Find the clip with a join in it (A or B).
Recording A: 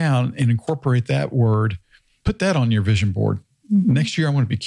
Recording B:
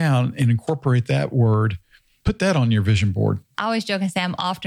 B